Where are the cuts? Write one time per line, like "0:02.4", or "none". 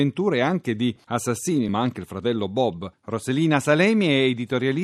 0:01.7
0:02.9